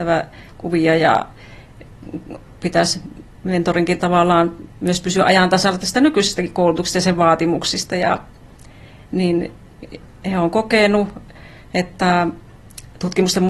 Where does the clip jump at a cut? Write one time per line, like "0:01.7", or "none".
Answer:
none

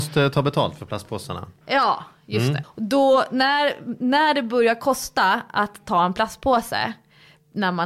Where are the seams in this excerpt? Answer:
0:02.6

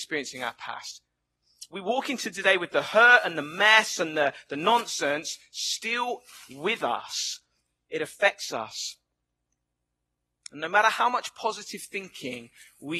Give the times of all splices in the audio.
none

